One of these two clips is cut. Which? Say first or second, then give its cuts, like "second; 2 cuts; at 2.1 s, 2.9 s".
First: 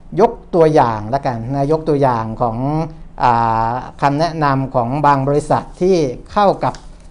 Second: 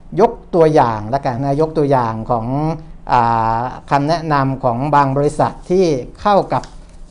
second; 1 cut; at 1.4 s